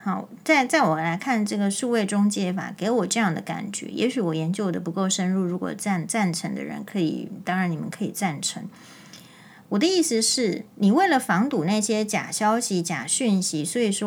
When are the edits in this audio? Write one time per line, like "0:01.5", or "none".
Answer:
0:10.7